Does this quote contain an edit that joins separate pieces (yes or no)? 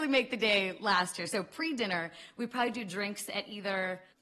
no